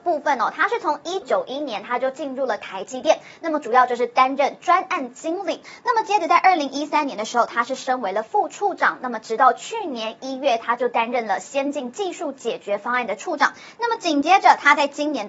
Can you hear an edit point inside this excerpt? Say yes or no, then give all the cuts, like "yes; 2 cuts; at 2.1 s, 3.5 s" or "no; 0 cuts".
yes; 1 cut; at 1.2 s